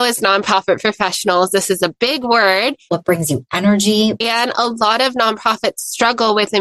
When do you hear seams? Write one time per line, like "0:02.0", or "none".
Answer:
0:02.9
0:04.2